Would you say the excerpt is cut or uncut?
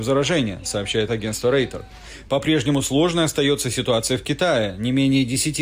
cut